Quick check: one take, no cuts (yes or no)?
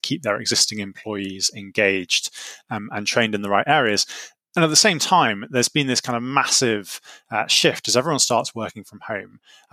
yes